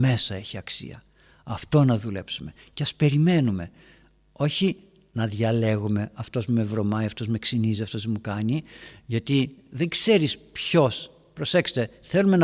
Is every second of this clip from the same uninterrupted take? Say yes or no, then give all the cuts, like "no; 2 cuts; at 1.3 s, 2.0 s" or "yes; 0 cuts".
yes; 0 cuts